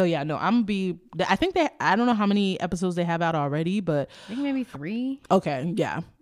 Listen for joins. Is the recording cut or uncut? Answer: uncut